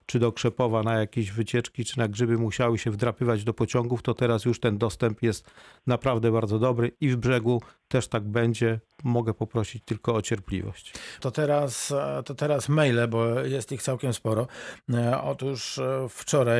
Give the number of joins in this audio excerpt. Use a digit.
1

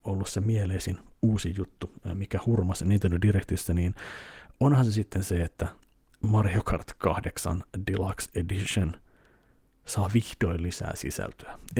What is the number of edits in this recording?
0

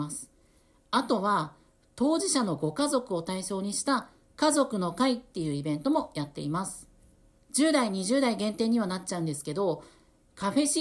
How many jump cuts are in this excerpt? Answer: 1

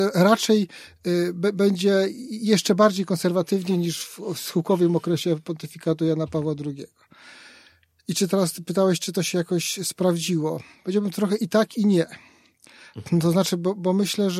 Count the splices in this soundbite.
0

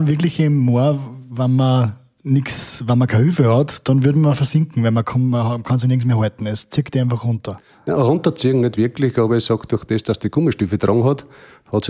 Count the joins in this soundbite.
0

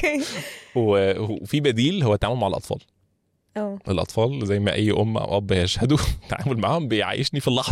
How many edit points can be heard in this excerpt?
0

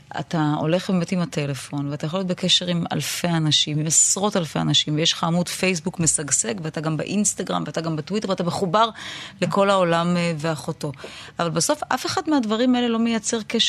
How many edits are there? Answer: 0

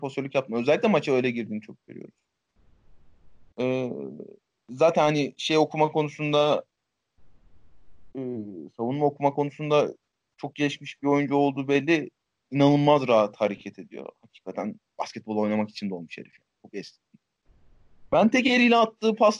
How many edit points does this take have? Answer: 0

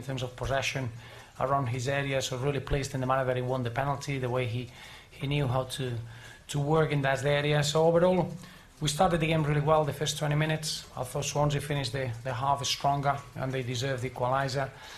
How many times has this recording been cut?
0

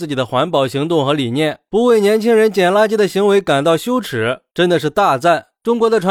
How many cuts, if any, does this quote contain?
0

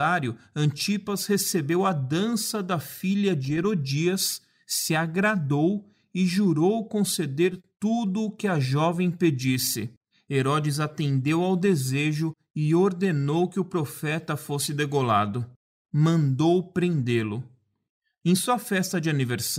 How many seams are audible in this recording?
2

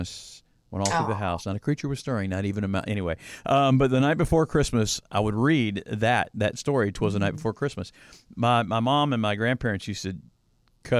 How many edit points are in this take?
0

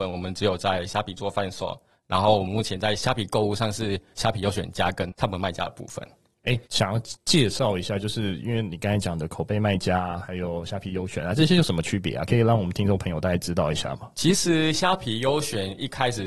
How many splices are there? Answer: 1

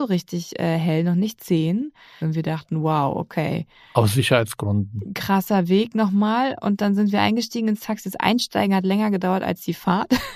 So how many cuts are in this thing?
1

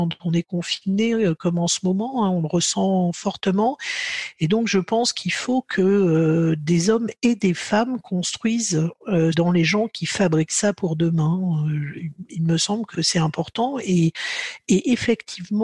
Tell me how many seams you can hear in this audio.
2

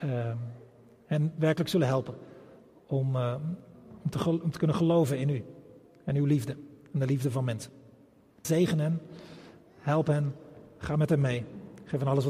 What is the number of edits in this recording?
1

